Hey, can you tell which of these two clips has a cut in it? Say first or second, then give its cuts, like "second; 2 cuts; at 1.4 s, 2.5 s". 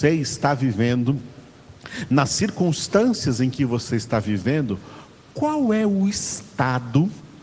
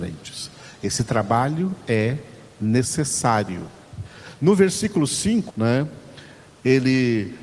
second; 2 cuts; at 4.4 s, 5.5 s